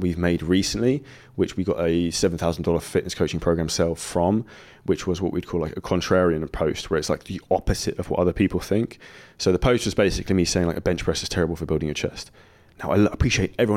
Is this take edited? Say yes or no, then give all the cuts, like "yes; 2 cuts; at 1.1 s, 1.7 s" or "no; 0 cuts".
no; 0 cuts